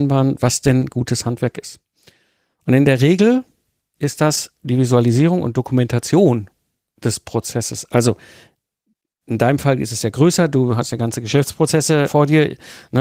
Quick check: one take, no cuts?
yes; 0 cuts

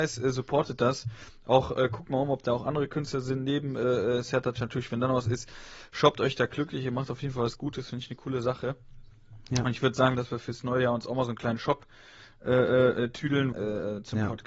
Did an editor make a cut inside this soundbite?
yes; 2 cuts; at 10.1 s, 13.5 s

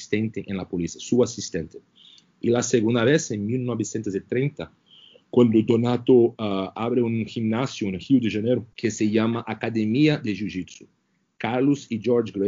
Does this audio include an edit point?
yes; 1 cut; at 8.7 s

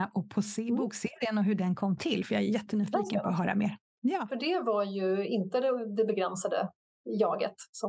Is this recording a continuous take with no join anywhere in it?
no; 1 cut; at 4.3 s

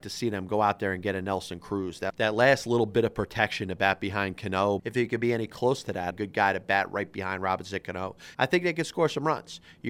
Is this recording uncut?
no; 3 cuts; at 4.8 s, 6.1 s, 8.3 s

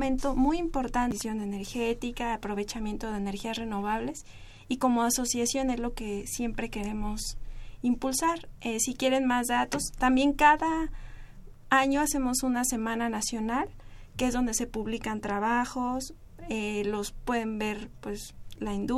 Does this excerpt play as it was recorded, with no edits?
yes; 0 cuts

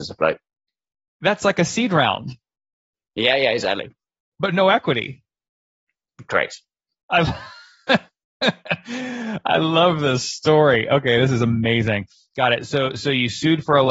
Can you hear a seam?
no; 0 cuts

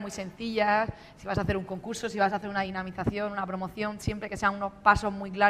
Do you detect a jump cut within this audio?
no; 0 cuts

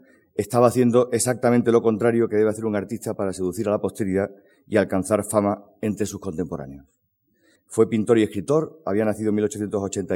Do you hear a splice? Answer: yes; 1 cut; at 7.6 s

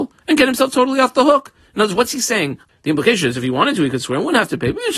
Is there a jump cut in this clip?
yes; 1 cut; at 2.7 s

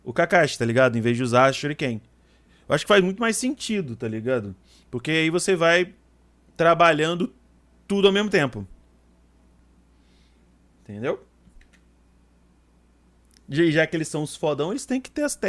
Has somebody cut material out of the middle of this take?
no; 0 cuts

